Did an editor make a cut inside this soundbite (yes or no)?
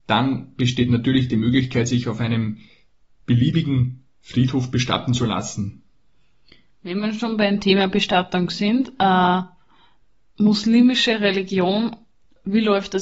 no